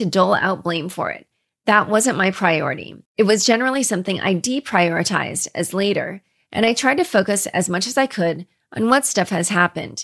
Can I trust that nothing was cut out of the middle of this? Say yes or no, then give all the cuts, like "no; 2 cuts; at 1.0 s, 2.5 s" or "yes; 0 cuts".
no; 1 cut; at 3.1 s